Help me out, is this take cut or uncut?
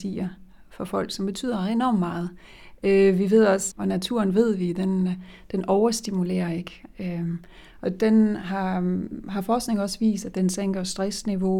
cut